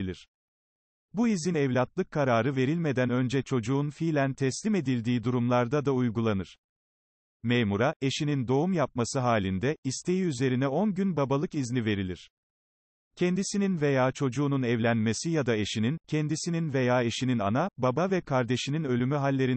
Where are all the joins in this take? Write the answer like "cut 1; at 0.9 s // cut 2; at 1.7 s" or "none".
cut 1; at 16.0 s